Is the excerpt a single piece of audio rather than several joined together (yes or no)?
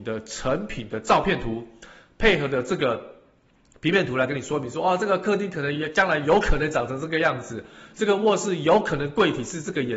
yes